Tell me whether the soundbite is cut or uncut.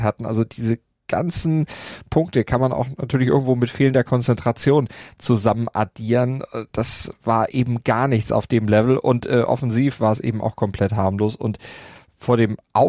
uncut